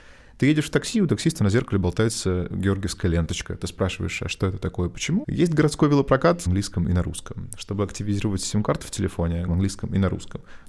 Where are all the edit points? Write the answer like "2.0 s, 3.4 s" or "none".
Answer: 5.2 s, 6.5 s, 9.5 s